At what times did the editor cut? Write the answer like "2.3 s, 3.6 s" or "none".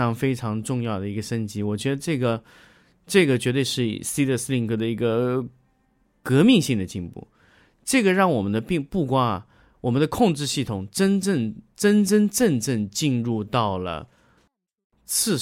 none